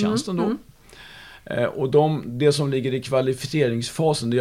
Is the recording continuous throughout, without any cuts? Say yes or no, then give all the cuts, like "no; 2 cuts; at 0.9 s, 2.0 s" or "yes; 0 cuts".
yes; 0 cuts